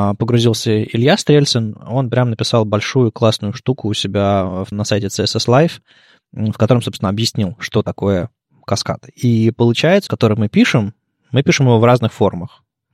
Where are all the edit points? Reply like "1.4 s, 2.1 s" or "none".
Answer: 4.7 s, 10.1 s